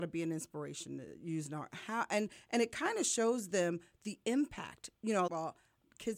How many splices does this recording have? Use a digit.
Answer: 1